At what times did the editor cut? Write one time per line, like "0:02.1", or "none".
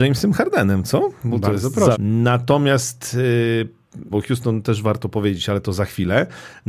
0:01.9
0:04.1

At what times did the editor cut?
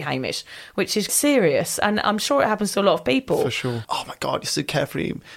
0:01.1
0:03.8

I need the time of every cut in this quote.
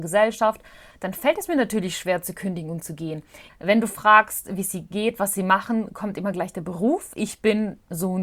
0:00.9
0:03.5

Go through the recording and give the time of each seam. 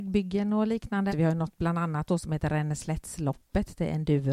0:01.1

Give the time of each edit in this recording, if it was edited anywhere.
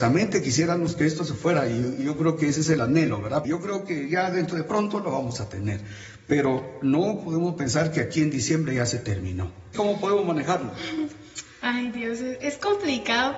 0:03.4
0:09.7

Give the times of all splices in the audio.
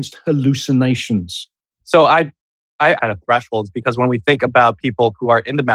0:01.8
0:03.0

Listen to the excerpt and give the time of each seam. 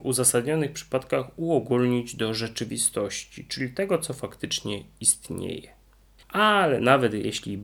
0:06.2

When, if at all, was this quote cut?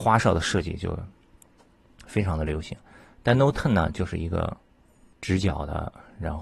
none

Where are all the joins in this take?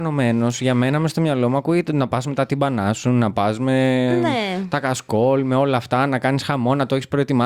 none

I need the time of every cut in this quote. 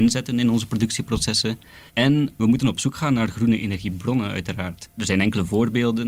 0:01.9
0:04.9

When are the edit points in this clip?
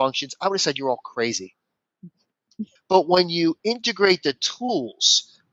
0:02.8

